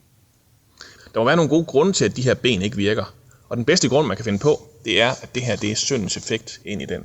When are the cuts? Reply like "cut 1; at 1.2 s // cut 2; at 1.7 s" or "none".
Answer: cut 1; at 1.0 s